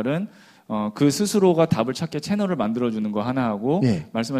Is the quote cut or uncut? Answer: uncut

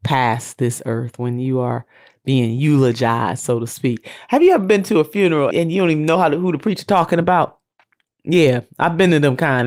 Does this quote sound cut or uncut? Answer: cut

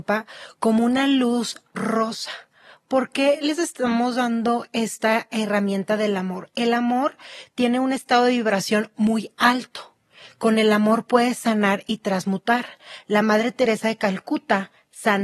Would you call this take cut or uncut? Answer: uncut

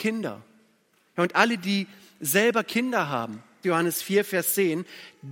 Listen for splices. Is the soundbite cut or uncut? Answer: cut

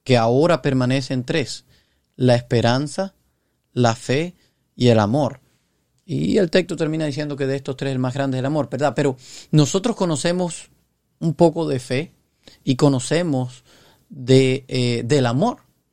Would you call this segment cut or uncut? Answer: uncut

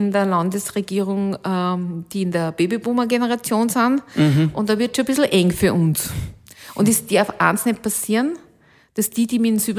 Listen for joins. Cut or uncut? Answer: uncut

